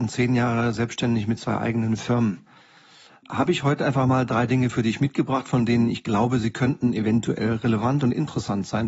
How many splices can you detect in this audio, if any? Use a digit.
0